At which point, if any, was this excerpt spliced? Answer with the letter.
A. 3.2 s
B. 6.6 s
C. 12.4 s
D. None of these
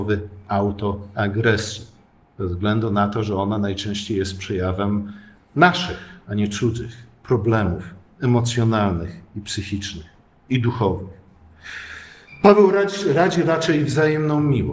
D